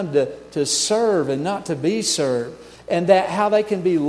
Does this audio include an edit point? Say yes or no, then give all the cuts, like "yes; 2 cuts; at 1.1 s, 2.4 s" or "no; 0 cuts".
yes; 1 cut; at 2.8 s